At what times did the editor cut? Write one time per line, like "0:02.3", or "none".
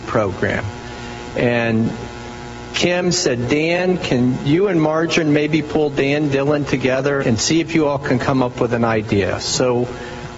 0:07.2

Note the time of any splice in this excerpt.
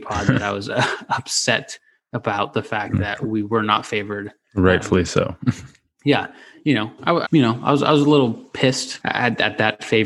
0:07.2
0:09.0

